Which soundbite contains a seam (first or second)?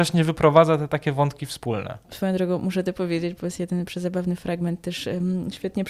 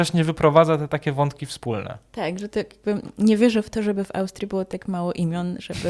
first